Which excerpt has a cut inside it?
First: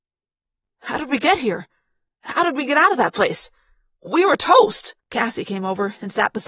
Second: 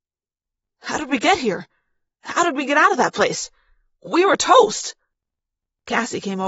first; 1 cut; at 5.0 s

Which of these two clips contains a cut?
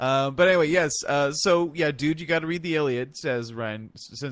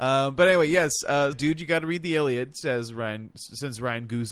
second; 1 cut; at 1.3 s

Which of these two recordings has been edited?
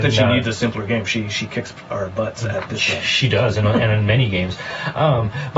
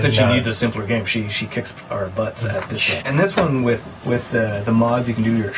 second; 1 cut; at 3.0 s

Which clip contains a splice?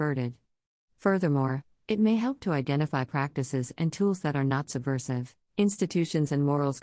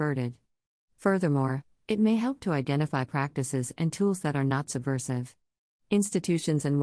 first; 1 cut; at 5.4 s

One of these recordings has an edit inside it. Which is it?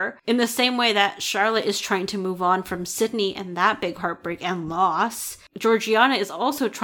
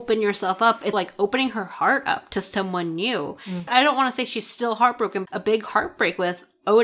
second; 2 cuts; at 0.9 s, 5.3 s

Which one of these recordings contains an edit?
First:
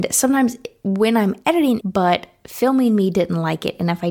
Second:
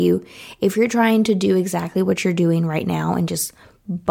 first; 1 cut; at 1.8 s

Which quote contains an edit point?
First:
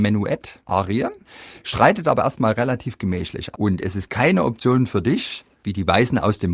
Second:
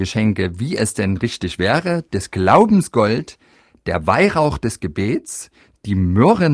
first; 1 cut; at 3.5 s

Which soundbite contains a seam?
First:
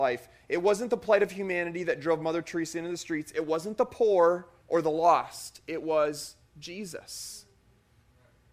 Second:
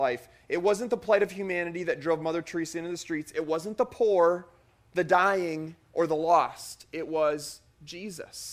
first; 1 cut; at 4.6 s

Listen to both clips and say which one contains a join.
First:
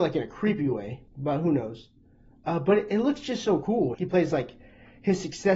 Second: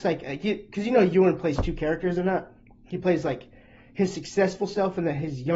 first; 2 cuts; at 1.1 s, 3.9 s

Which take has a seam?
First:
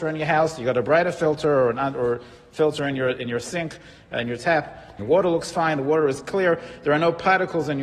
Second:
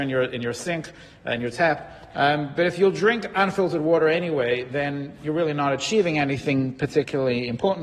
first; 1 cut; at 5.0 s

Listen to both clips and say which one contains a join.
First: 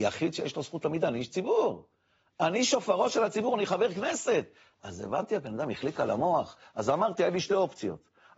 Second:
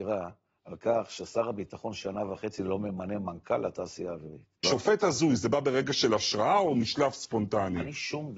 second; 1 cut; at 4.6 s

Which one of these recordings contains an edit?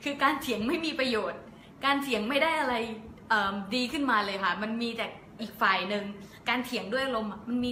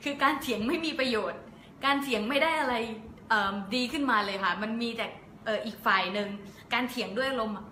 first; 1 cut; at 5.4 s

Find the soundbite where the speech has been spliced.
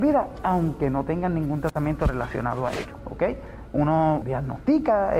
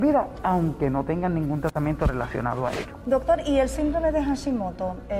first; 2 cuts; at 3.0 s, 4.2 s

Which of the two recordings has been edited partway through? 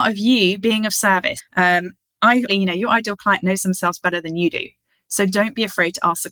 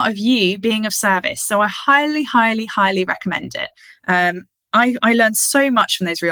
first; 2 cuts; at 1.4 s, 2.5 s

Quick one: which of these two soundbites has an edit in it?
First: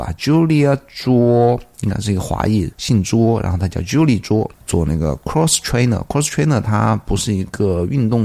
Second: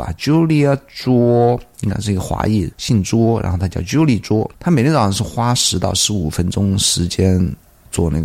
first; 1 cut; at 4.5 s

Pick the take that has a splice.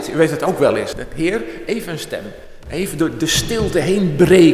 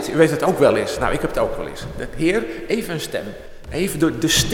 first; 1 cut; at 0.9 s

